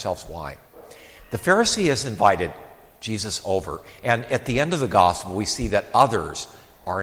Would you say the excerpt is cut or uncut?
uncut